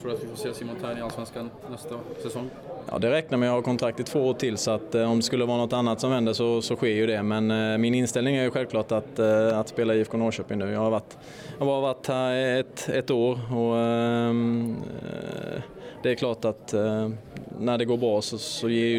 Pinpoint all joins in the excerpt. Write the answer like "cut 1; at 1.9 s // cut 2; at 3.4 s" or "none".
none